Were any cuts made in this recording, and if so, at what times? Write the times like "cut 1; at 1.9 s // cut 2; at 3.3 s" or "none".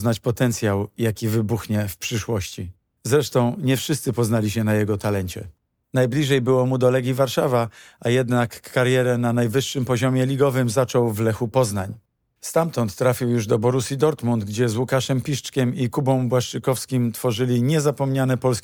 none